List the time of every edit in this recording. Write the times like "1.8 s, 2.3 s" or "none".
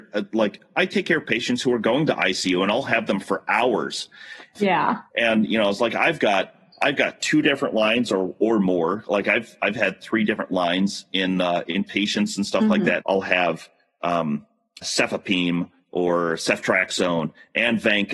4.5 s, 13.0 s, 14.8 s